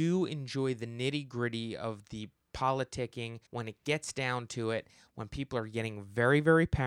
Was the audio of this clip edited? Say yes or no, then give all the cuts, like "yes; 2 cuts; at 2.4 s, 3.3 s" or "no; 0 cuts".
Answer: yes; 1 cut; at 3.5 s